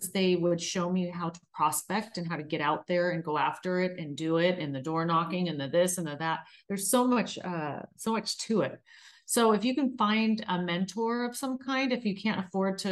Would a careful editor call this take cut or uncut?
uncut